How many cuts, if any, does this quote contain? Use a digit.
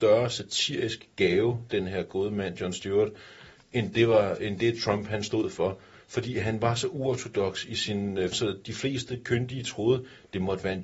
1